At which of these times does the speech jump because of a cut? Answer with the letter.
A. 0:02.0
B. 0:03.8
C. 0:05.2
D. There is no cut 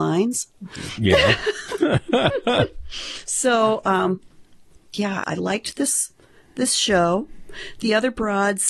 C